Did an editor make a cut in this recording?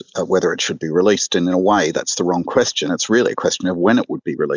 no; 0 cuts

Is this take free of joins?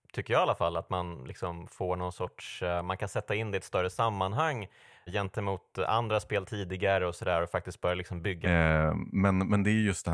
no; 2 cuts; at 5.1 s, 8.4 s

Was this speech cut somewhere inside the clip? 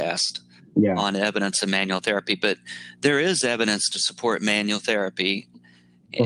no; 0 cuts

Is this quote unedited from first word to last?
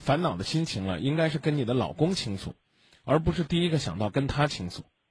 yes; 0 cuts

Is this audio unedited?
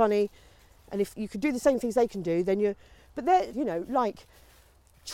no; 2 cuts; at 1.1 s, 3.5 s

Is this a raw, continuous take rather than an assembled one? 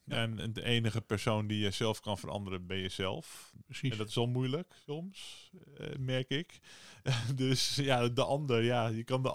yes; 0 cuts

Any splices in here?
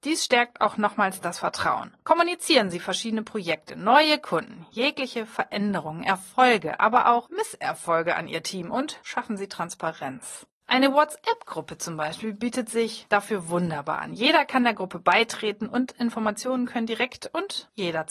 no; 0 cuts

